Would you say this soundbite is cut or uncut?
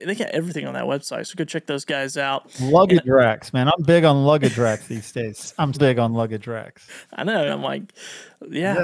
cut